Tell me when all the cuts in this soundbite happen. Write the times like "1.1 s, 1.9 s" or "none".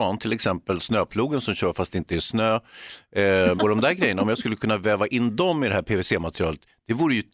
3.6 s